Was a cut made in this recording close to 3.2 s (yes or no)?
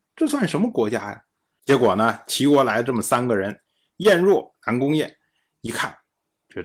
no